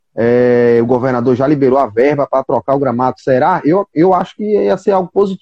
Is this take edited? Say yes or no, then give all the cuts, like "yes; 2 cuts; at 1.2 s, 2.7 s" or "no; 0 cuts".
no; 0 cuts